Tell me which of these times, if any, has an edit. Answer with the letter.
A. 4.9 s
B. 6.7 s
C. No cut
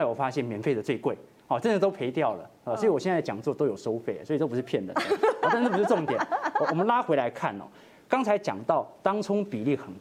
C